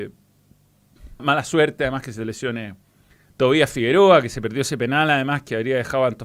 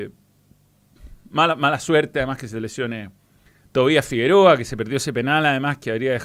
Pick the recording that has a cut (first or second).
first